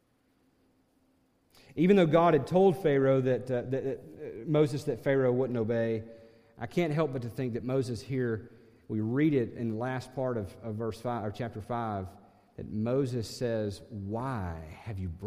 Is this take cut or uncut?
uncut